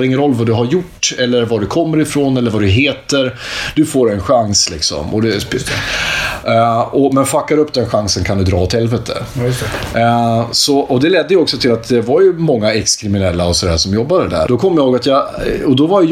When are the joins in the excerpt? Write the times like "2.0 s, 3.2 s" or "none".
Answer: 14.5 s